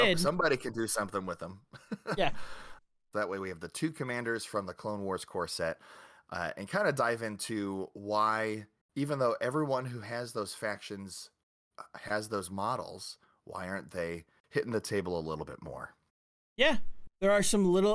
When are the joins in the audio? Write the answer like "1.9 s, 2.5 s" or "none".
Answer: 3.1 s